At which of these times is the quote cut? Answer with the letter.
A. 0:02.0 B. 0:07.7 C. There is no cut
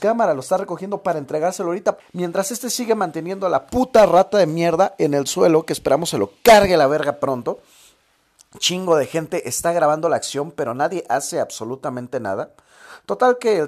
A